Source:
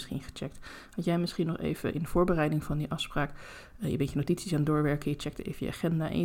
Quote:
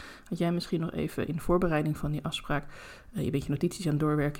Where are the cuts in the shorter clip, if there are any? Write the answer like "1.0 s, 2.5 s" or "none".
none